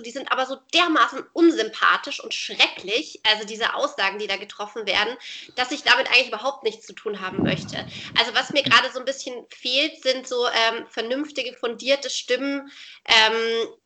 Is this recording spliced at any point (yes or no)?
no